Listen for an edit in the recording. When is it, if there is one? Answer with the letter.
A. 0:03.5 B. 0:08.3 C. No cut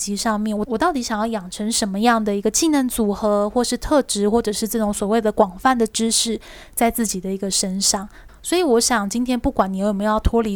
B